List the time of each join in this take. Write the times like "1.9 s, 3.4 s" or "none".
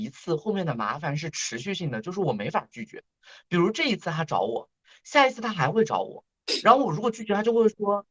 none